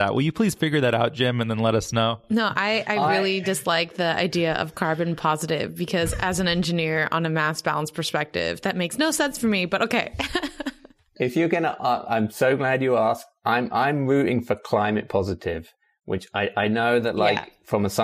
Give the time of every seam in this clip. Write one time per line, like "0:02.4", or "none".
none